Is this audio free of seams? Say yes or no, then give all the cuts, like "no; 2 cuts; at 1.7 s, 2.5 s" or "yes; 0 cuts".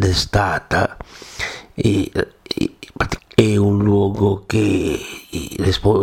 no; 1 cut; at 3.2 s